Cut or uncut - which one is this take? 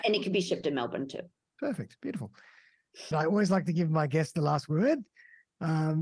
cut